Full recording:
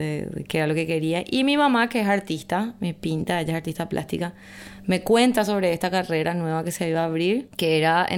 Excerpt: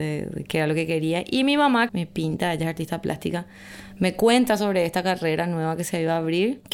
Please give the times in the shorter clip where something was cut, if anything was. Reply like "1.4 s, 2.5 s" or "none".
1.9 s